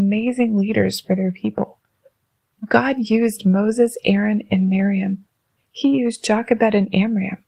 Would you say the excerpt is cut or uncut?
cut